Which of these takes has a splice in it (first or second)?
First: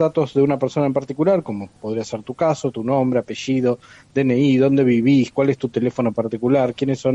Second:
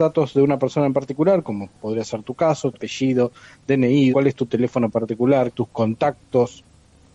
second